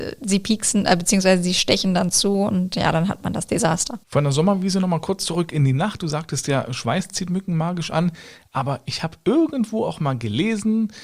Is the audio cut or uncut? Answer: cut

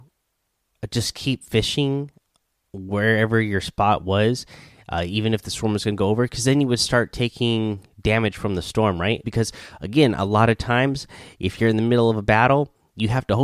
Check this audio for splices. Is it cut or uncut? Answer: cut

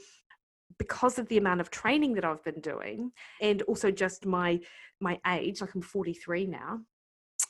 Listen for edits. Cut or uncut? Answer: cut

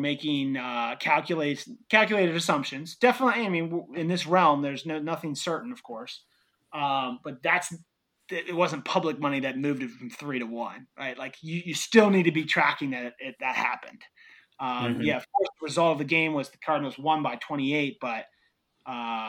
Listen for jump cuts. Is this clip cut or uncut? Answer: uncut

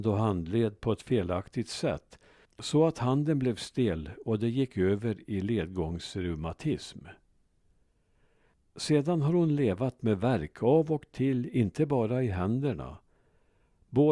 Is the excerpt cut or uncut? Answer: uncut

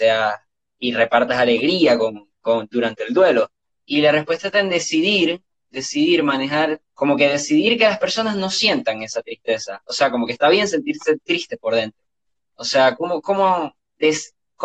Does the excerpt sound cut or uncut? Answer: cut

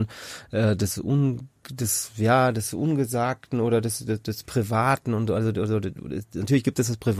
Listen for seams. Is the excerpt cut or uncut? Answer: uncut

